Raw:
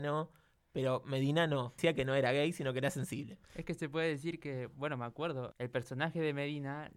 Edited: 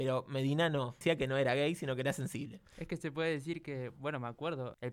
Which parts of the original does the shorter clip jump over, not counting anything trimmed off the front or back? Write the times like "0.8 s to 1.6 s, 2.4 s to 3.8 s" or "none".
none